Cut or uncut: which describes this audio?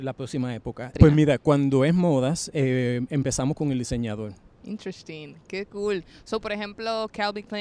cut